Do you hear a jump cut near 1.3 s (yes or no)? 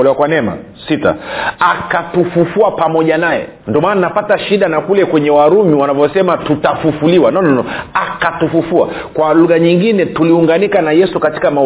no